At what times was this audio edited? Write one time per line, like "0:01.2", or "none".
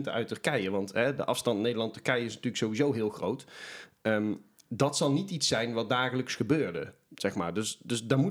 none